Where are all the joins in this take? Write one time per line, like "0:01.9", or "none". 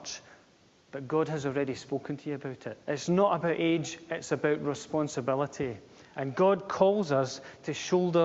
0:02.8